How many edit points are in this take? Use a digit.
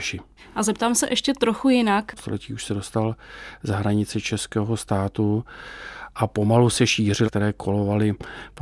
2